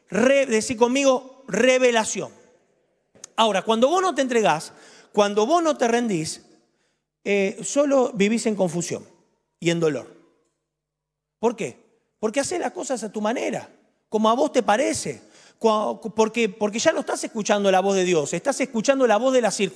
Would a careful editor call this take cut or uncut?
uncut